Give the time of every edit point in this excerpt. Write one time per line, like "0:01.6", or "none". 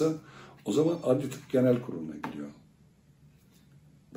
none